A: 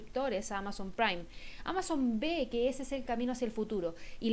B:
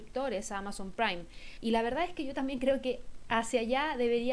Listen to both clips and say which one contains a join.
B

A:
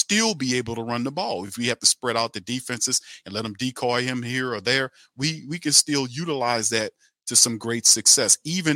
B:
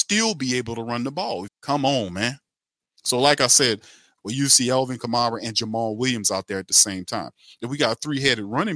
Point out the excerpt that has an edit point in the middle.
B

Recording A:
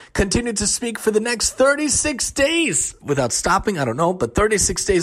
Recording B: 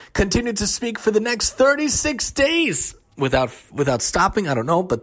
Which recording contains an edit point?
A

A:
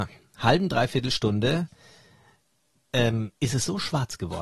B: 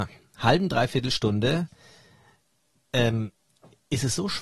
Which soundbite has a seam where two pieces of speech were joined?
A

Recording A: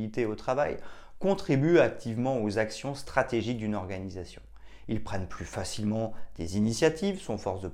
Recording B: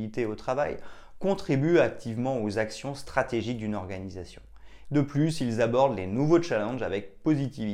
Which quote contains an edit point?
B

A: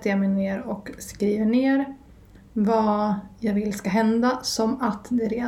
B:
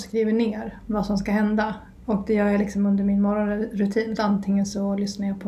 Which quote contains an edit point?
B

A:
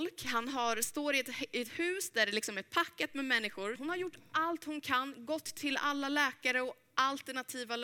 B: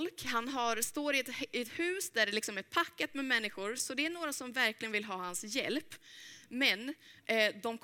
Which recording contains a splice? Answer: A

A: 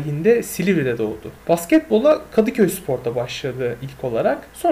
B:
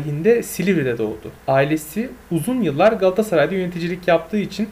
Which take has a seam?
A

